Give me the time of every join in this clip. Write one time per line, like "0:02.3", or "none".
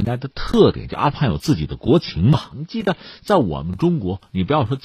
0:02.5